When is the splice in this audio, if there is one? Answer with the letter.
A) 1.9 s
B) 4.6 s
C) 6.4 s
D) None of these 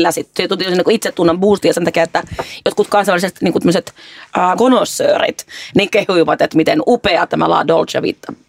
B